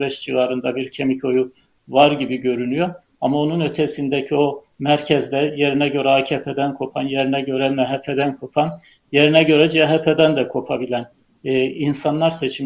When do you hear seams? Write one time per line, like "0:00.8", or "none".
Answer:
none